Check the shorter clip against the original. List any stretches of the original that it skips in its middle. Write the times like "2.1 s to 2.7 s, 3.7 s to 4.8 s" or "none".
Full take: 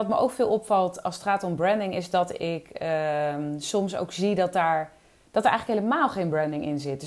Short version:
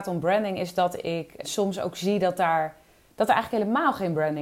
2.8 s to 3.6 s